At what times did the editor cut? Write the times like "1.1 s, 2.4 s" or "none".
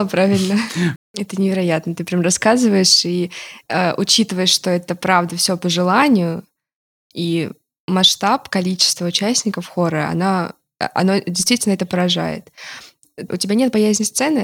1.0 s, 13.3 s